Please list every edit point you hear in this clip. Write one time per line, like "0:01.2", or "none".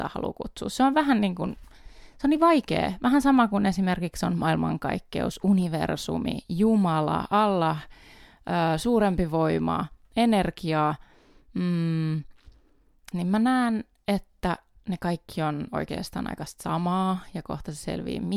0:13.1